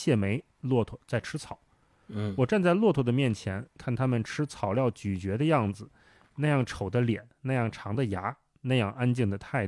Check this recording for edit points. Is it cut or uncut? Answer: uncut